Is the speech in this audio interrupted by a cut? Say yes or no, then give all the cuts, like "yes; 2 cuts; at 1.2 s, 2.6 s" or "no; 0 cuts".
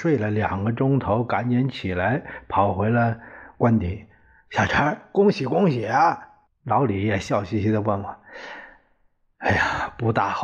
yes; 1 cut; at 6.5 s